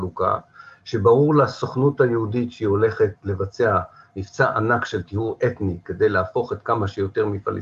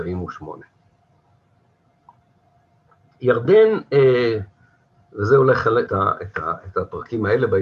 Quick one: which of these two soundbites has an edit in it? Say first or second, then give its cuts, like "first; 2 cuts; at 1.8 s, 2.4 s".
second; 1 cut; at 5.9 s